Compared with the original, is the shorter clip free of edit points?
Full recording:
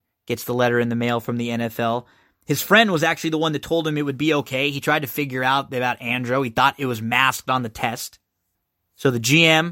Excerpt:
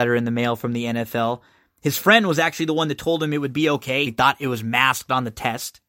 no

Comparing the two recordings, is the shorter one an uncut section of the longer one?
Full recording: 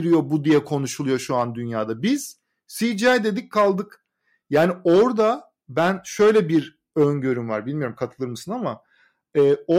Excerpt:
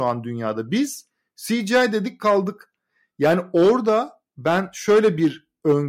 yes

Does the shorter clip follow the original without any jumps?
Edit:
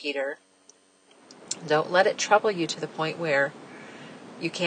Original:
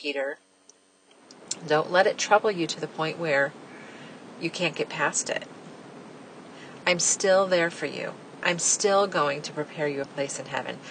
yes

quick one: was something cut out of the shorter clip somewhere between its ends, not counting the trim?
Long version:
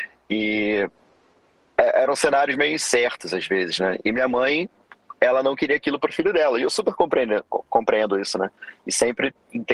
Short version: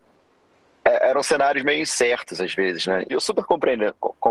yes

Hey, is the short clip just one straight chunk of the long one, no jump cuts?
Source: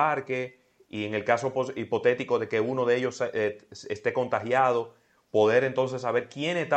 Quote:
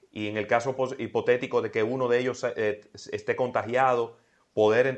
yes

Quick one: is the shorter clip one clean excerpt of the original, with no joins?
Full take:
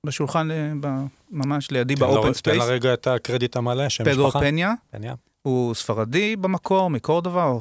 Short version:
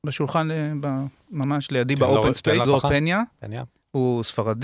no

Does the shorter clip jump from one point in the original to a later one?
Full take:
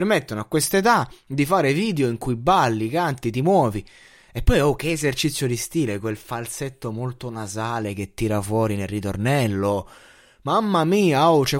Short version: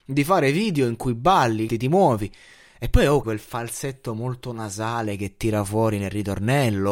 yes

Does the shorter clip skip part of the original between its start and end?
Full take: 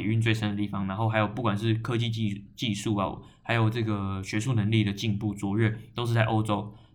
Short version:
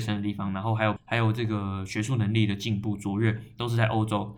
yes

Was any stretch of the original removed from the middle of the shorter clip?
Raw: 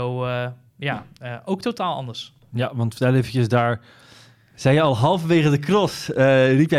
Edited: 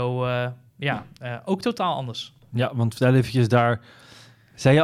no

